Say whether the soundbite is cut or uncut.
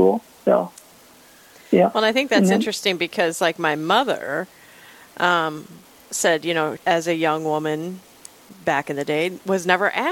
cut